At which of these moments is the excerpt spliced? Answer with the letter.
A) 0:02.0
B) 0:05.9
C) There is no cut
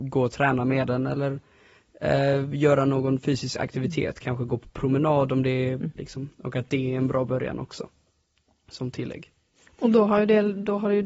B